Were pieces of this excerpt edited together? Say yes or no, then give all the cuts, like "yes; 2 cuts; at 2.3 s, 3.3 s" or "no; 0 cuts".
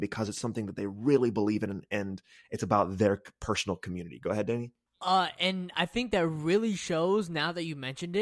no; 0 cuts